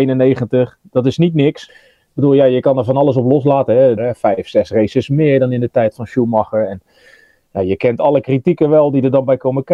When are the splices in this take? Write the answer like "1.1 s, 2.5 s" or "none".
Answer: 1.7 s, 4.0 s